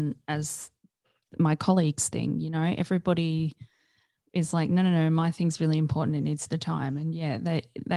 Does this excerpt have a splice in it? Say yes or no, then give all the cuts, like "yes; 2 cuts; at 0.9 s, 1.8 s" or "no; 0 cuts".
no; 0 cuts